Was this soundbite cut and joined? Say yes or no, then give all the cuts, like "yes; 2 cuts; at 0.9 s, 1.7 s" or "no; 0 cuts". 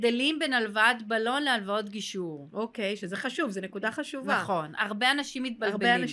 no; 0 cuts